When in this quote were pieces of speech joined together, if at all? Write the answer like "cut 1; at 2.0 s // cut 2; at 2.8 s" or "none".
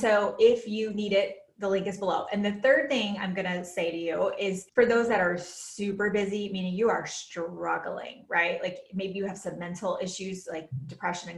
cut 1; at 4.7 s